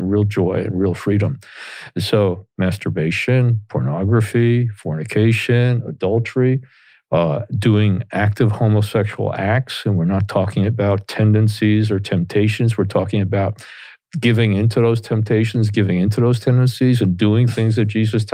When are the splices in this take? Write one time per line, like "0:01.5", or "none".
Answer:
0:02.5